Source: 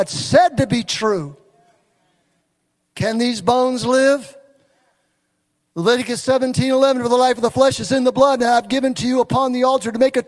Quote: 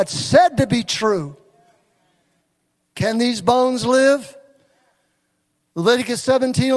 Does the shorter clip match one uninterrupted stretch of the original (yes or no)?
yes